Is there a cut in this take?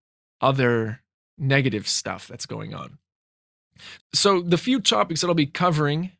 yes; 1 cut; at 4.0 s

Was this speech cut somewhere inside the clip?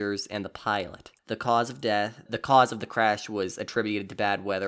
yes; 2 cuts; at 1.2 s, 2.3 s

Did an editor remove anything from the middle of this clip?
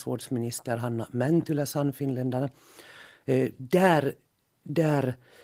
no; 0 cuts

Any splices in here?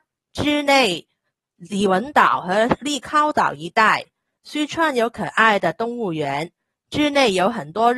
no; 0 cuts

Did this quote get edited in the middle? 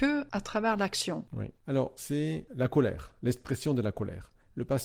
yes; 1 cut; at 2.0 s

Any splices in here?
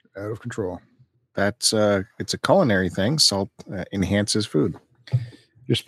no; 0 cuts

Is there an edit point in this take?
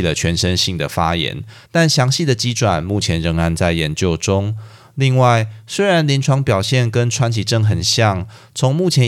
no; 0 cuts

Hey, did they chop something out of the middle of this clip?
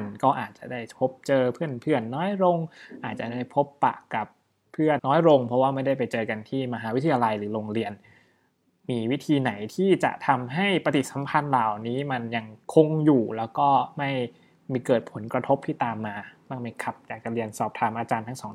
yes; 2 cuts; at 5.0 s, 12.6 s

